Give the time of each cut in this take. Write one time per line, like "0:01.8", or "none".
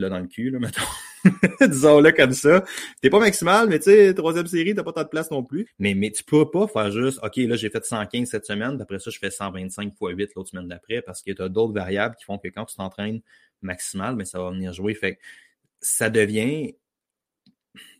0:05.7